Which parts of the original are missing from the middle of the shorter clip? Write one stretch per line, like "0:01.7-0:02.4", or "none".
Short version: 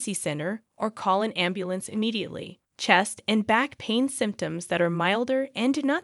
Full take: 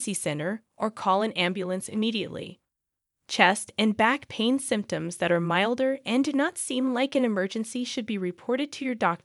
0:02.7-0:03.2